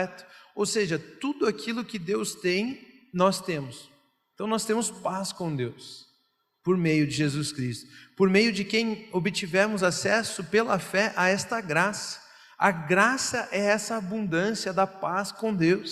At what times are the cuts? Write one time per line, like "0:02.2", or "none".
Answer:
0:04.3